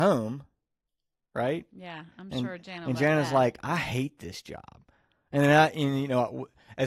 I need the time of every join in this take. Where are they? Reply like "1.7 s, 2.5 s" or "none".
none